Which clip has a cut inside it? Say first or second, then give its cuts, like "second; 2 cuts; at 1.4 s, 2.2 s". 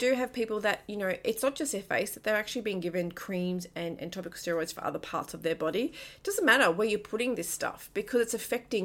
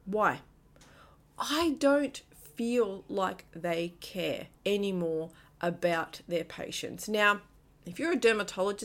second; 2 cuts; at 1.2 s, 4.5 s